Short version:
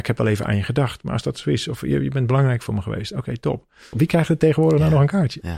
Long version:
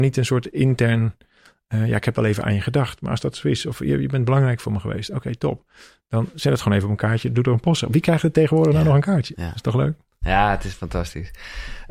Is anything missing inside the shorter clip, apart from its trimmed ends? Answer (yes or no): yes